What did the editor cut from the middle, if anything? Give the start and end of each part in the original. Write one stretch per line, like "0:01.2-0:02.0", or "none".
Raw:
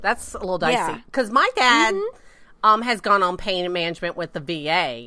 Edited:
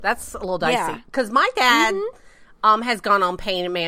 none